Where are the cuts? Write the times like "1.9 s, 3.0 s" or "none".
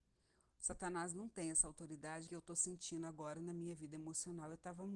2.3 s